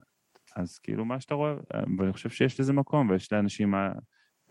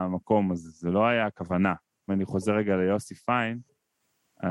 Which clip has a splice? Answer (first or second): second